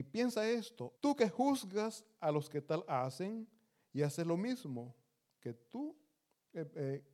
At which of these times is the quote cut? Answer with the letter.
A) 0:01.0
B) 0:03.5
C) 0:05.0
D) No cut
A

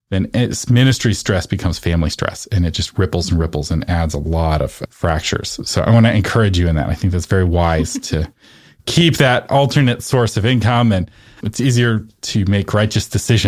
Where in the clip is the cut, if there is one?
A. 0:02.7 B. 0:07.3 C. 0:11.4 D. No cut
C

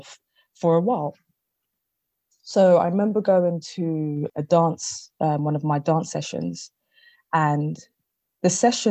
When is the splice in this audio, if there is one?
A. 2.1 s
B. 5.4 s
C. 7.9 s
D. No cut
D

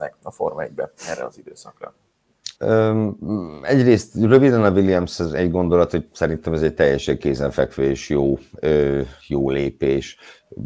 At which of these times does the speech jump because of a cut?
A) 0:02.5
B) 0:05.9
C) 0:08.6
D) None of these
A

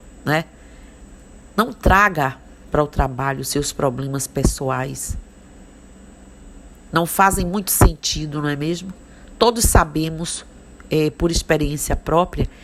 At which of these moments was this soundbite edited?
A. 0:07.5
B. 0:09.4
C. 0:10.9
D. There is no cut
D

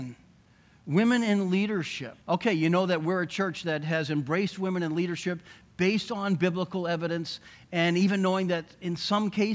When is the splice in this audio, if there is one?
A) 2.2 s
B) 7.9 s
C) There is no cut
A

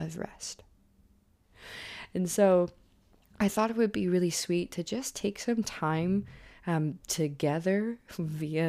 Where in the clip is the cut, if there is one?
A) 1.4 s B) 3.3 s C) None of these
A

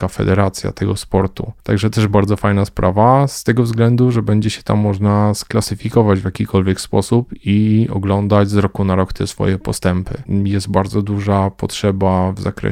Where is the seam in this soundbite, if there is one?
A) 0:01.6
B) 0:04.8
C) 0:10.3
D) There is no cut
C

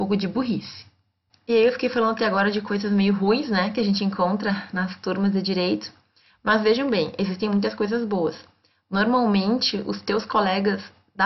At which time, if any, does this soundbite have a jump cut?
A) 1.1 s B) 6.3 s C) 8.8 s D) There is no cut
D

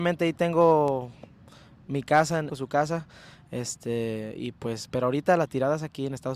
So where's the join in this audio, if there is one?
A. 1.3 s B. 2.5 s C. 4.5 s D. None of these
B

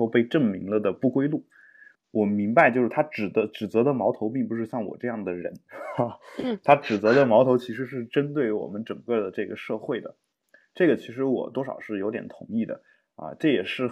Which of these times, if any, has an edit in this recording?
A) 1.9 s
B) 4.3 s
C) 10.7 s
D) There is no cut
A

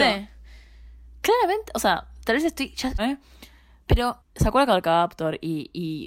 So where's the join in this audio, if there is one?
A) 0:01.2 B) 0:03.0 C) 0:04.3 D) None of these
B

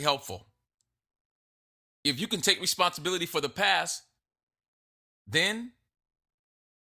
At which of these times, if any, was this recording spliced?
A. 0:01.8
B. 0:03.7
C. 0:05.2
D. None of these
A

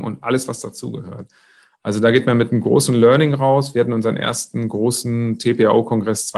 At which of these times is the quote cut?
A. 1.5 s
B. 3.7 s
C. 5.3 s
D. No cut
D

